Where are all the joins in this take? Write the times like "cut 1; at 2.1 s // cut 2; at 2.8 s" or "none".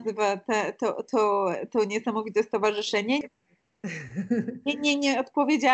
cut 1; at 3.2 s